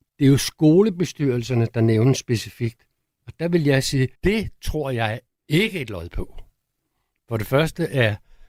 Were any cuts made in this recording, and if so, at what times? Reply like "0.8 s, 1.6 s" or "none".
4.1 s